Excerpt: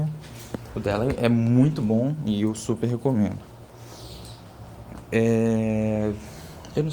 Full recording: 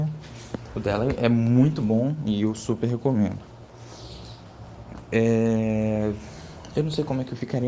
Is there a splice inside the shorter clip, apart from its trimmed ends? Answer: no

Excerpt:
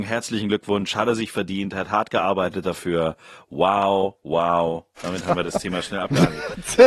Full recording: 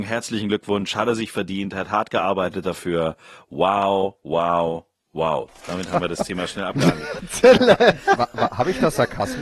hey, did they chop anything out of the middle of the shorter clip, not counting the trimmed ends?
yes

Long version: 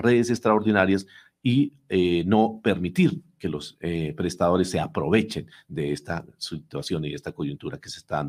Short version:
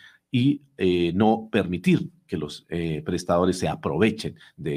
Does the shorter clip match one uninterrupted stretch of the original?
yes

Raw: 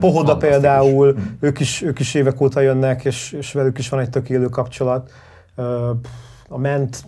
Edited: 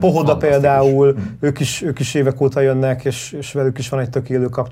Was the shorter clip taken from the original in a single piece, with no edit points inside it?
yes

